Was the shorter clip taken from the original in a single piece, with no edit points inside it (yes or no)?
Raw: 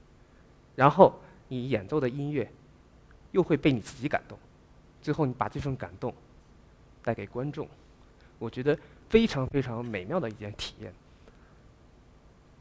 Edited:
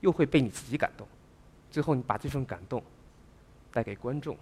yes